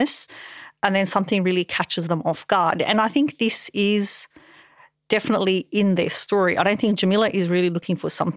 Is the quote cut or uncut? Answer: uncut